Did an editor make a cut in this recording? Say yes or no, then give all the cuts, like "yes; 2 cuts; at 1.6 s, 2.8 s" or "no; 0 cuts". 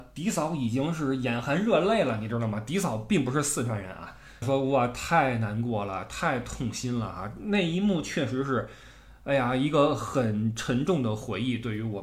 yes; 1 cut; at 4.4 s